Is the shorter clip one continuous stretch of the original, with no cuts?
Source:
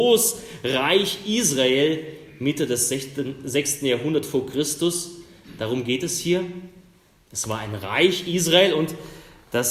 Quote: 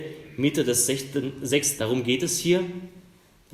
no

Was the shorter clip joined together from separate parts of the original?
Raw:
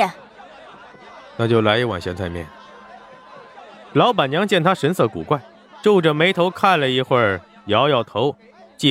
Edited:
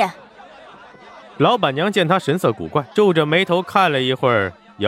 yes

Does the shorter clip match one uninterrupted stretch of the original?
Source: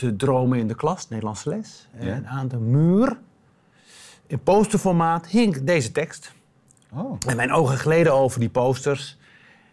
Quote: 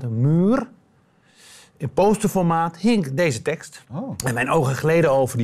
no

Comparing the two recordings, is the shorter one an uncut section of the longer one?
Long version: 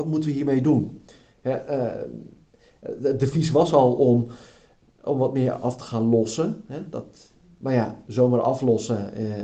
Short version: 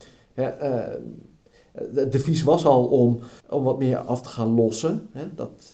no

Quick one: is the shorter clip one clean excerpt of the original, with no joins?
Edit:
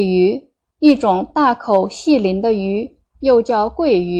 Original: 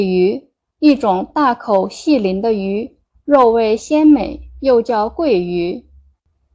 no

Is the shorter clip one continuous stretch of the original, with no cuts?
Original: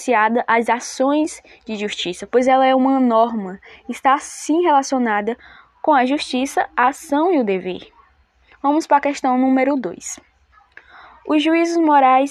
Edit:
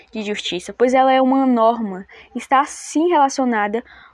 yes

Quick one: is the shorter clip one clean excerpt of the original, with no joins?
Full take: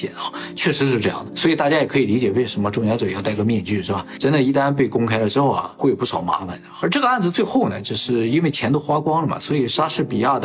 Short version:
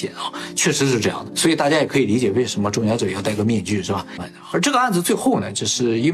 no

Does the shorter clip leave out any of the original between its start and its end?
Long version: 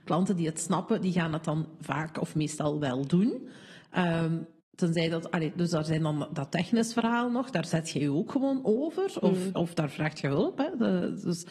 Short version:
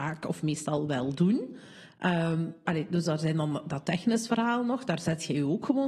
yes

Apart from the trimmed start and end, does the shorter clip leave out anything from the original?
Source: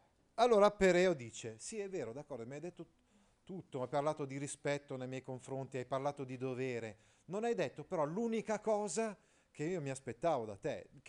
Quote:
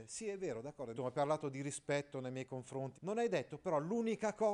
yes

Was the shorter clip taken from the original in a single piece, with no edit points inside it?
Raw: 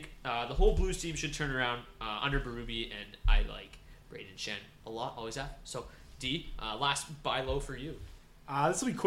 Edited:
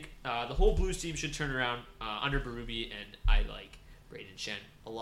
yes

